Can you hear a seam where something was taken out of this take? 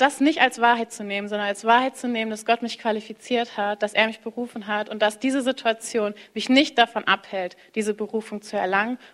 no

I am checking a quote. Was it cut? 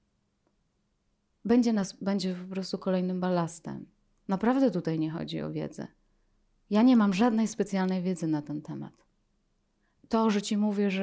no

